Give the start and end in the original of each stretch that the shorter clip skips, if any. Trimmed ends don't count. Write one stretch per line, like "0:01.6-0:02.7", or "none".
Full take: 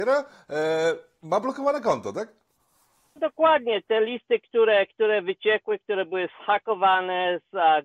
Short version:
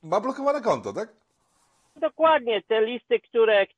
none